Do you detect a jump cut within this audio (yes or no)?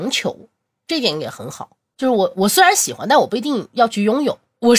no